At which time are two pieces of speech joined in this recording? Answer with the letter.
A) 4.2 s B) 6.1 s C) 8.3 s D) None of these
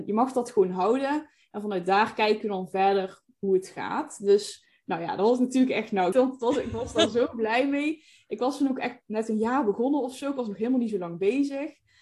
B